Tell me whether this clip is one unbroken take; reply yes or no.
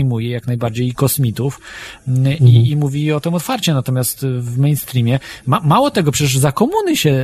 yes